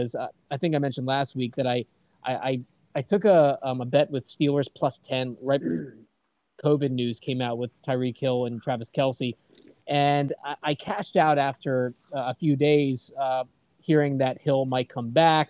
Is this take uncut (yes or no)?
yes